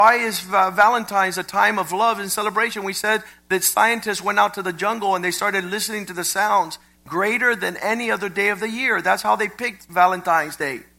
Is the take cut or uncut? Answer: cut